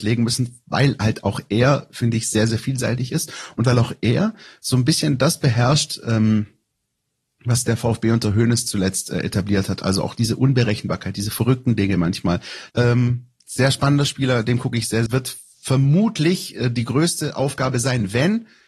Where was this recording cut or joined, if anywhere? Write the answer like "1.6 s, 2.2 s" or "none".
12.7 s, 15.1 s